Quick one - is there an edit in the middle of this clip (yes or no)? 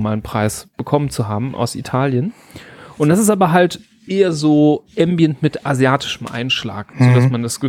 no